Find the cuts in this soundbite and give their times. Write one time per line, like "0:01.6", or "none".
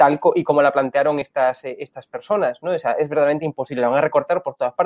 none